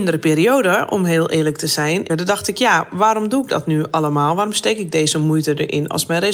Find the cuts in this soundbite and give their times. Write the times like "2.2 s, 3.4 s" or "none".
2.1 s

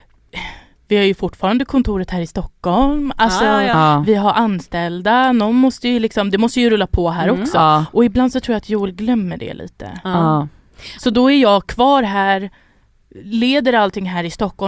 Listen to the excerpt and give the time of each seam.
none

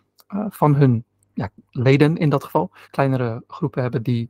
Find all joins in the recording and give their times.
2.8 s

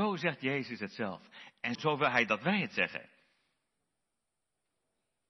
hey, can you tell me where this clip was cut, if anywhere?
1.8 s

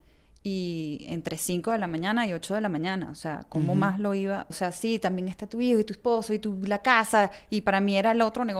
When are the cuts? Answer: 4.5 s

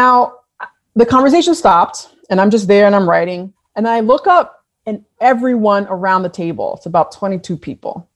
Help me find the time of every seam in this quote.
3.5 s

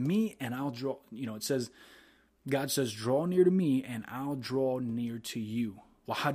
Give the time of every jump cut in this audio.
none

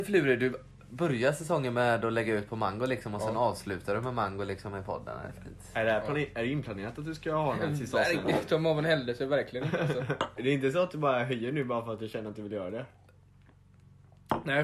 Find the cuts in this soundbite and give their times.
10.4 s

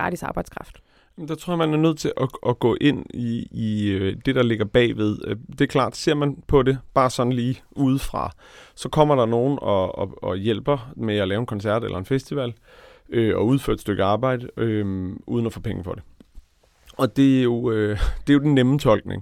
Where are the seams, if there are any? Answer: 2.4 s

